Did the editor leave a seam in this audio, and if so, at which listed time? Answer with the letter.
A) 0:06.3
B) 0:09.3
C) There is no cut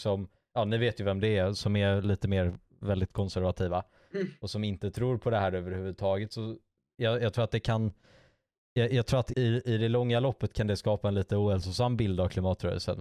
B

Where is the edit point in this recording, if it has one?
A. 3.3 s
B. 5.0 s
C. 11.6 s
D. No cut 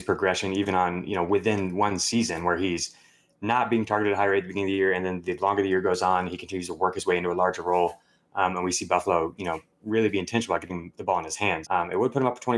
C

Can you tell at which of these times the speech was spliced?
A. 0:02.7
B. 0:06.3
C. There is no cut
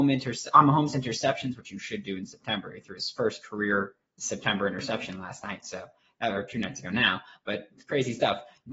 C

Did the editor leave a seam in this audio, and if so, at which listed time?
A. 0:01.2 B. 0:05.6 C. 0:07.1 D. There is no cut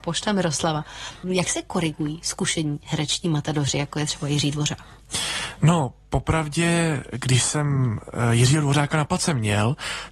A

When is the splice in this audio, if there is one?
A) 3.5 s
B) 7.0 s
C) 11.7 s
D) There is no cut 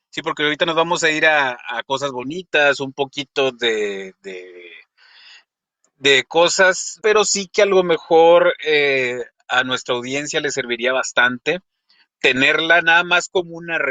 B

